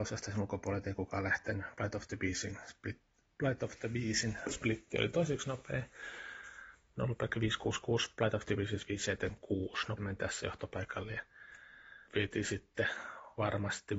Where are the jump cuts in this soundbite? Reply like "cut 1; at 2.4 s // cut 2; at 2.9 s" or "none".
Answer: cut 1; at 10.0 s // cut 2; at 12.1 s